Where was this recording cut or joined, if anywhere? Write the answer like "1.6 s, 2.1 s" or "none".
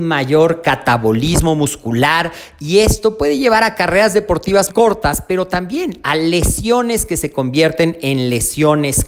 4.7 s